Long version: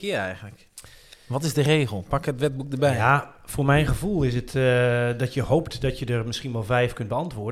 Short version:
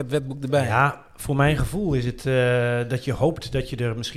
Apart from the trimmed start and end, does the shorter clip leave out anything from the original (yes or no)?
no